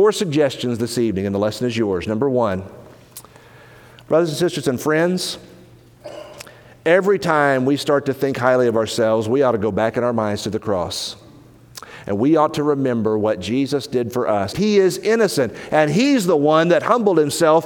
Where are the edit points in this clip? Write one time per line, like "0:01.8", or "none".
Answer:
0:14.5